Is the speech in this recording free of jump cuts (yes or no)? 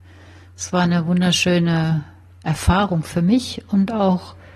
yes